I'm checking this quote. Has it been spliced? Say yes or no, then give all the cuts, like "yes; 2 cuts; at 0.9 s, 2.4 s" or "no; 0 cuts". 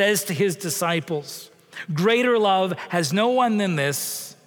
no; 0 cuts